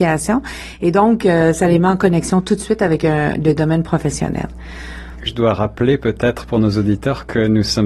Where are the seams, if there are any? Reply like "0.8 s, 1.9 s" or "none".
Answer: 5.3 s